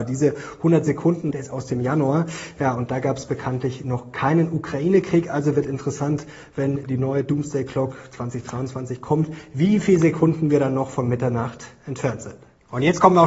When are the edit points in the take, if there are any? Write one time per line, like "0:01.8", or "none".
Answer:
0:01.3